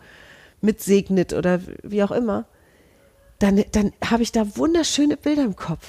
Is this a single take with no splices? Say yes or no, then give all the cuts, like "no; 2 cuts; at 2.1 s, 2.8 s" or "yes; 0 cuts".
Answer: yes; 0 cuts